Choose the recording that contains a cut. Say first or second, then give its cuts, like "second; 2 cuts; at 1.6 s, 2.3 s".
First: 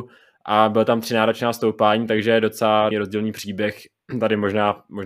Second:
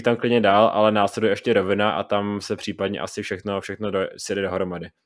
first; 1 cut; at 2.9 s